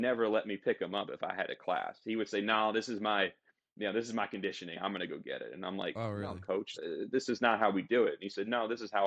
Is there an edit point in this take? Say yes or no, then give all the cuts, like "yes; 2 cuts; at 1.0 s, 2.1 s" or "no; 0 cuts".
yes; 1 cut; at 6.8 s